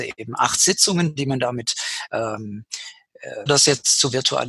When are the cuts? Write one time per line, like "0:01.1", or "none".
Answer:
0:03.5